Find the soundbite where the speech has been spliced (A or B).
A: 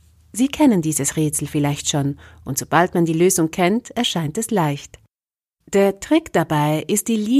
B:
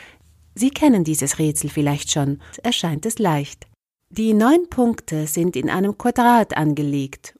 B